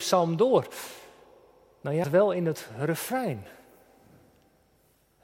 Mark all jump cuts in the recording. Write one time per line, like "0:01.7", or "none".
0:02.0